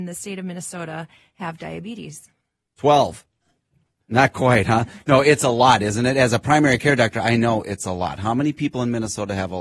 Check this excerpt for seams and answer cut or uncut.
uncut